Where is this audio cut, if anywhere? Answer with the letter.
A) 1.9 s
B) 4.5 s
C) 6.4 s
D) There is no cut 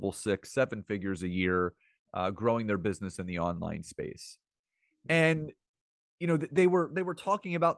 D